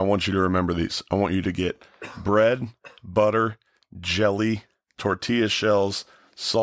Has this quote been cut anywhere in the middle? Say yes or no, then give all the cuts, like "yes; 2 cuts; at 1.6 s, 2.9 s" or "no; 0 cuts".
yes; 1 cut; at 4.9 s